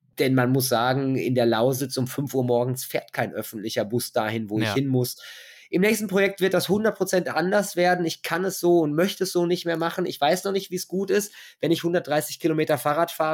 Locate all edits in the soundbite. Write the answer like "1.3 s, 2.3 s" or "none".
none